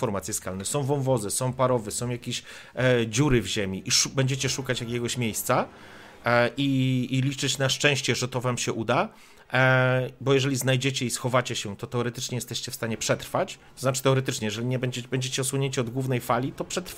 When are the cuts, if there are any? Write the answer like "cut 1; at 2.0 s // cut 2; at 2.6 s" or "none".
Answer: none